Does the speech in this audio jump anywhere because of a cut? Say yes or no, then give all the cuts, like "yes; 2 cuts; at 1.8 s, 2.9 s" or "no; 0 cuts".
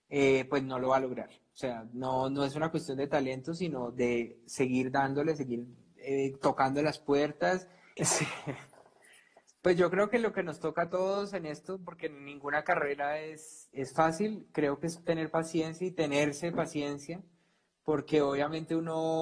yes; 2 cuts; at 8.0 s, 13.7 s